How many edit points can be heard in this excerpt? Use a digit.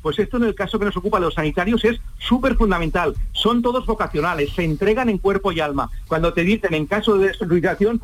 1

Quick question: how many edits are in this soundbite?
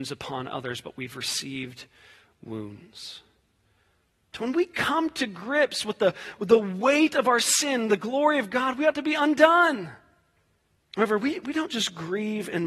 2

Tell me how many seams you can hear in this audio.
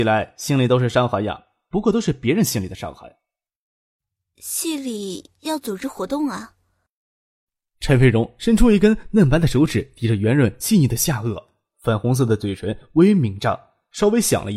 0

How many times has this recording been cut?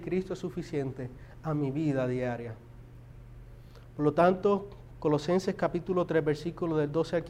0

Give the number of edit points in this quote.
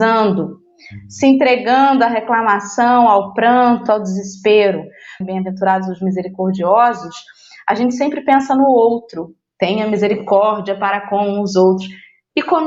1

